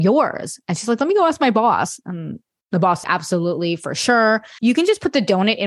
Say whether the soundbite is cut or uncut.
cut